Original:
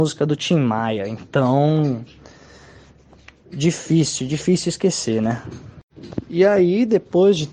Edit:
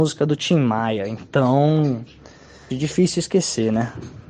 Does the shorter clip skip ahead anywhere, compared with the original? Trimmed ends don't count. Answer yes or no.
yes